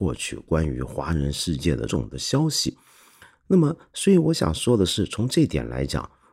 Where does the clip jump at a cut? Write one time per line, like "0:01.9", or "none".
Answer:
0:01.9